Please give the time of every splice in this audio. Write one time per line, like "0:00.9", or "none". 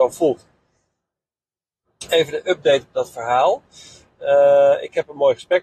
none